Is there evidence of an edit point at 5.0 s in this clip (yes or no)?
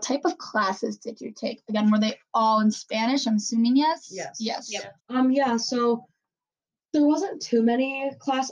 yes